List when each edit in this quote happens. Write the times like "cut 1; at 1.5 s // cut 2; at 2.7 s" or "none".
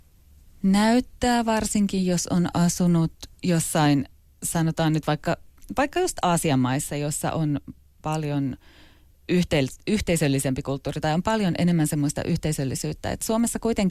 cut 1; at 3.4 s